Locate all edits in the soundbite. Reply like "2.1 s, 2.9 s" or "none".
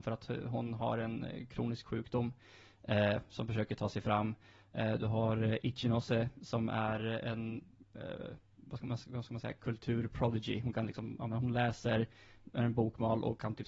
none